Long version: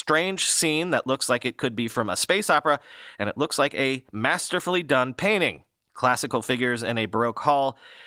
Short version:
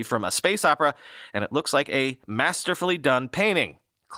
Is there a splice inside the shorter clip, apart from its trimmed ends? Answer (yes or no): no